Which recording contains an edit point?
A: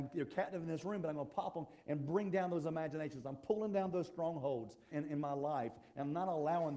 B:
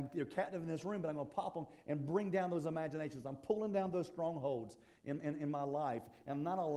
A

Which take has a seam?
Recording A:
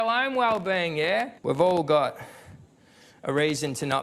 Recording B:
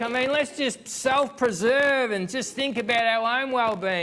A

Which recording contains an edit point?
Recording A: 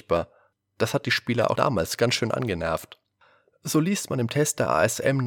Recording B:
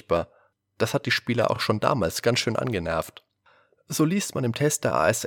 A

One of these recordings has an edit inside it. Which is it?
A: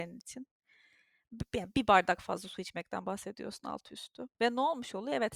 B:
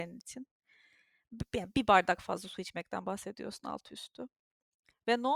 A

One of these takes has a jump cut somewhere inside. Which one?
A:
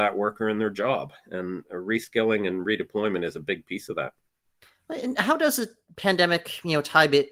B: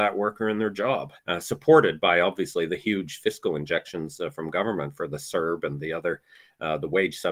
B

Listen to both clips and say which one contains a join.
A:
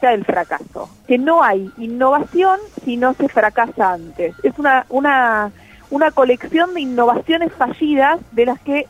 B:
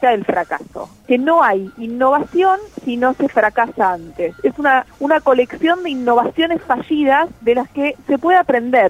B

